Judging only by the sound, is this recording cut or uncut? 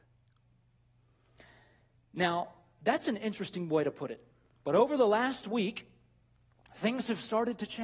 cut